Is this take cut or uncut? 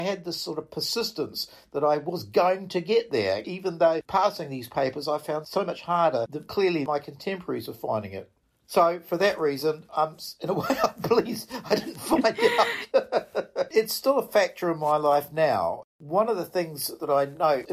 cut